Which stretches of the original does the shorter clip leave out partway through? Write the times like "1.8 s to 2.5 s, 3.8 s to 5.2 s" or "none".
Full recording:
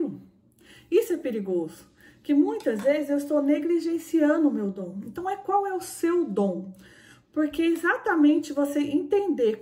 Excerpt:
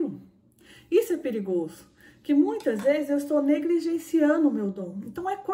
none